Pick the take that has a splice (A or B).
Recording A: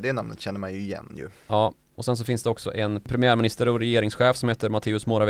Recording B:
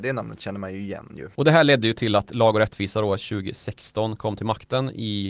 B